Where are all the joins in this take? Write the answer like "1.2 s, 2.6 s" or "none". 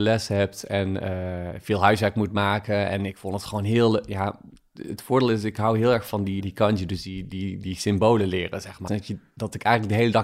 6.4 s, 8.9 s

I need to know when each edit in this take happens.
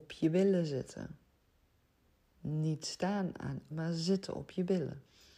3.7 s

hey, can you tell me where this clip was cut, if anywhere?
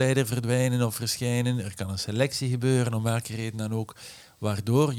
none

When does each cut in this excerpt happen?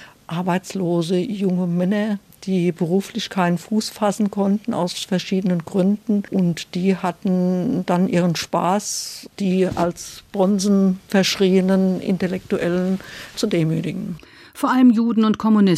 none

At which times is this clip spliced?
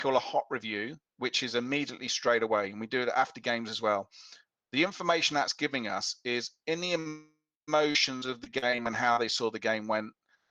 none

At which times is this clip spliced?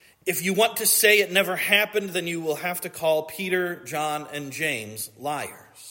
none

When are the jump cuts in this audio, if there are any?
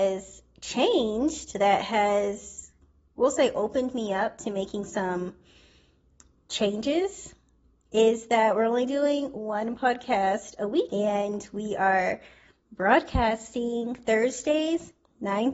10.9 s

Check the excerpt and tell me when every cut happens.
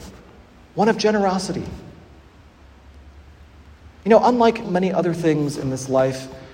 4.6 s

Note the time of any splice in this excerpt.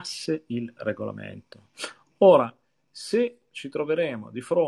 none

